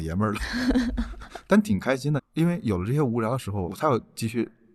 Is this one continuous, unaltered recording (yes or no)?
no